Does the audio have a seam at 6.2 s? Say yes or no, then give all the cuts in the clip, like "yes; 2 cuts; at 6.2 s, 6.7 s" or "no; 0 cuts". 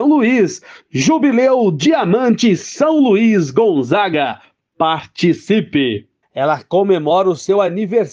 yes; 1 cut; at 6.2 s